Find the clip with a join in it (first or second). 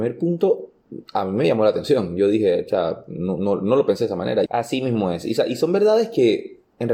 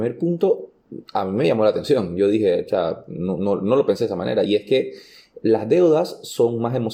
first